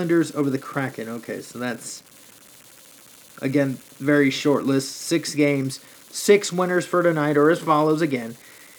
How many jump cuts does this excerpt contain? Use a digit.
0